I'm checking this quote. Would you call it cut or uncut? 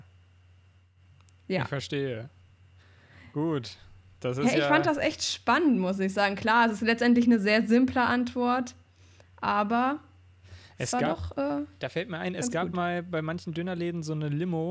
uncut